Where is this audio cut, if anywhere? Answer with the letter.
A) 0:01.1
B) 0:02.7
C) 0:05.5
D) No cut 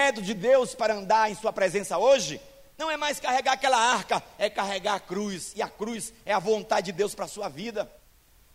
D